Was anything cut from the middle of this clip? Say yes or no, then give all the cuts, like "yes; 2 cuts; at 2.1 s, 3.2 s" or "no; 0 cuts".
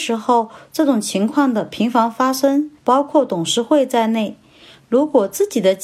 yes; 1 cut; at 2.8 s